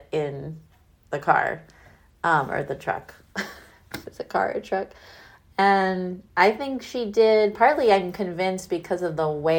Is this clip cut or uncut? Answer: uncut